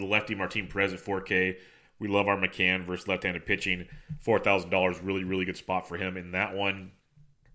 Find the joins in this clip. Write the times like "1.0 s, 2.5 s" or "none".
none